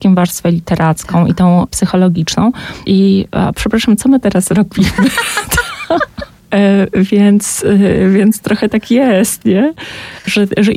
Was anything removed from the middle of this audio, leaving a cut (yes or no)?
yes